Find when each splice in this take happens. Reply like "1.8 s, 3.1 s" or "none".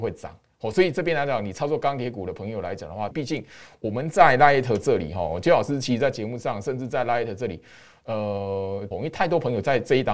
3.1 s, 8.9 s